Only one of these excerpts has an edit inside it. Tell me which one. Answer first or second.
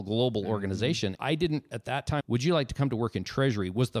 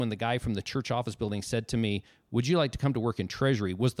first